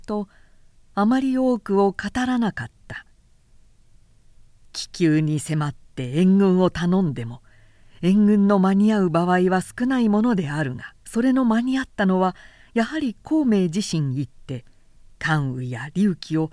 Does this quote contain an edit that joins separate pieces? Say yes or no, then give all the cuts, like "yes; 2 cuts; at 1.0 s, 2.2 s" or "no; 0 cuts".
yes; 1 cut; at 11.0 s